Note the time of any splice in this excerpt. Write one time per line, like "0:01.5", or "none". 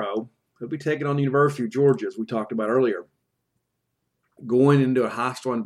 0:04.4

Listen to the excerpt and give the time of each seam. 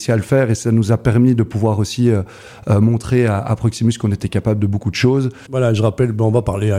0:05.5

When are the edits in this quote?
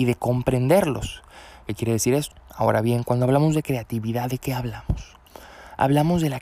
0:02.3

